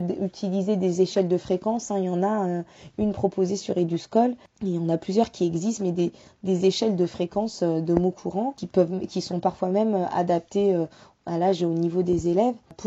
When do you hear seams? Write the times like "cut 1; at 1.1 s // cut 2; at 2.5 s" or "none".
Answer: none

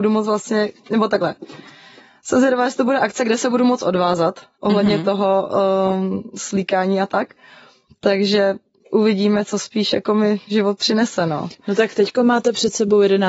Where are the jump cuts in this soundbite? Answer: none

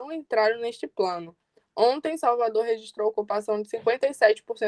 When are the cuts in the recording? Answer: none

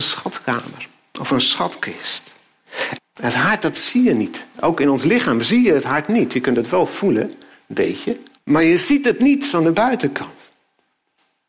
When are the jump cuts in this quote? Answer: cut 1; at 3.0 s // cut 2; at 8.4 s

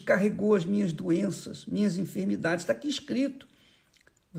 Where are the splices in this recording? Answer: none

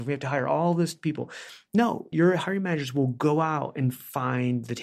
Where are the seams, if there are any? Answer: none

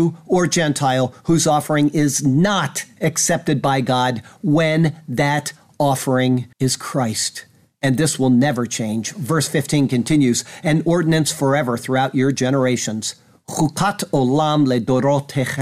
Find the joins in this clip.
cut 1; at 6.5 s

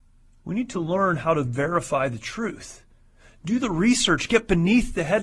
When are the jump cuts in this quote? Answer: none

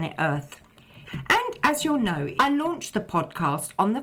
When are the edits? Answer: cut 1; at 1.1 s // cut 2; at 2.3 s

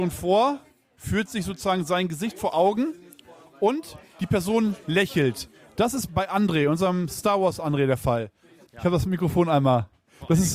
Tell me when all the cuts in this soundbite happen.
cut 1; at 6.1 s // cut 2; at 8.7 s

